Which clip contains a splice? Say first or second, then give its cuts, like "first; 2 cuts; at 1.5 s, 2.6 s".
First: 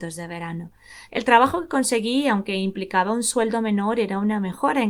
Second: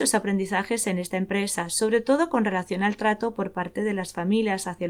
first; 1 cut; at 1.1 s